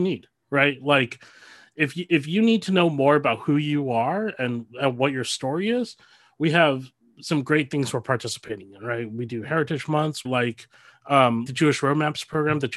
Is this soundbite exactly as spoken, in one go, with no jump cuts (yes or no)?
no